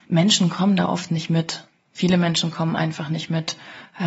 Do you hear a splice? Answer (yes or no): no